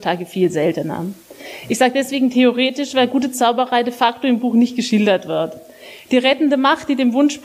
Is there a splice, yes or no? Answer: no